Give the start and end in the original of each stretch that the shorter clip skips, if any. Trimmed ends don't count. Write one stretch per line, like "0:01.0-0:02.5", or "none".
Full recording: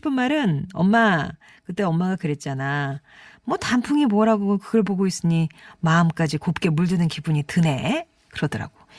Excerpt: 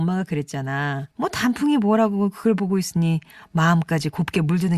0:03.0-0:03.4